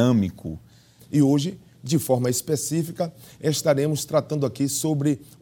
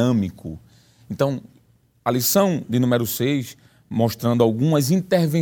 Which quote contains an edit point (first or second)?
first